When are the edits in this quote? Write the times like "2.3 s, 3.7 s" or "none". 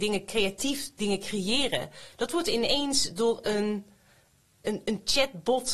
4.6 s